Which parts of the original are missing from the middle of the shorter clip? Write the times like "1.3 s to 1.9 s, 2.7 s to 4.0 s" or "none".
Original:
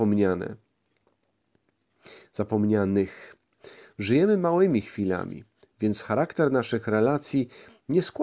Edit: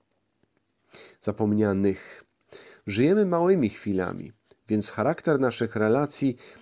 none